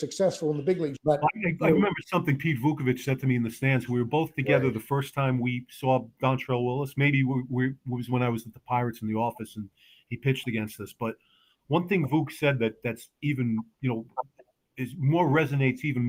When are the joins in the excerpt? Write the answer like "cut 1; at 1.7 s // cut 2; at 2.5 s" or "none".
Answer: cut 1; at 1.0 s